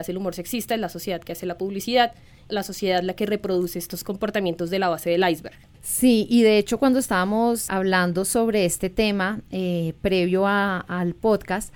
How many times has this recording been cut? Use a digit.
1